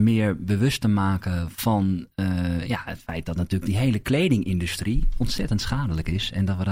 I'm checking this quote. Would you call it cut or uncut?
uncut